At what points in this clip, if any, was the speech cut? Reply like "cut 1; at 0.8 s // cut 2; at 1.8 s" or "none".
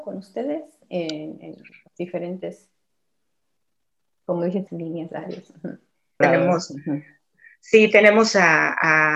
cut 1; at 4.7 s // cut 2; at 6.2 s